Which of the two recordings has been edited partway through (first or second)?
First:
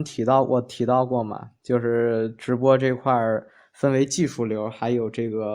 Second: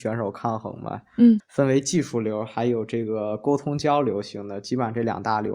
second